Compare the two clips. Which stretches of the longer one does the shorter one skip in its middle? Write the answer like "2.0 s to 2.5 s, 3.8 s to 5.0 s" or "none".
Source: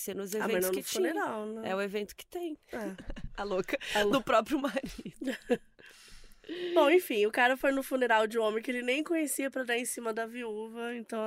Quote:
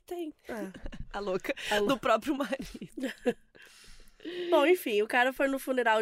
none